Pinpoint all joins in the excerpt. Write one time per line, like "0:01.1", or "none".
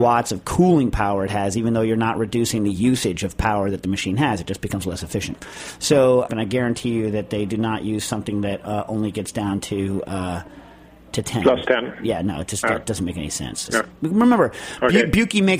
0:06.3
0:13.7